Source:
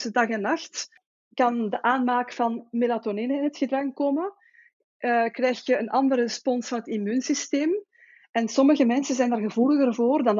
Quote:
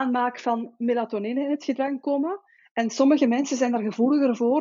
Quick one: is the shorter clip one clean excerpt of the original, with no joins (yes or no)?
no